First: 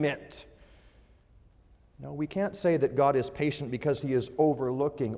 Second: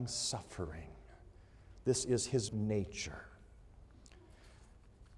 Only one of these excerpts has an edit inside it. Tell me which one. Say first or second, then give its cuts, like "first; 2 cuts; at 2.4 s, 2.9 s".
second; 1 cut; at 2.5 s